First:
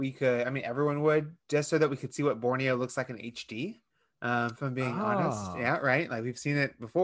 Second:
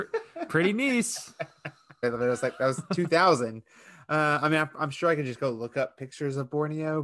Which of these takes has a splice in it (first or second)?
second